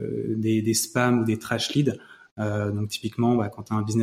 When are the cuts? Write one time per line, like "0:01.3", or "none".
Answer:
none